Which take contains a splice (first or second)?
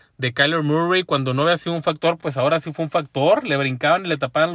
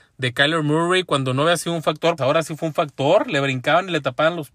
second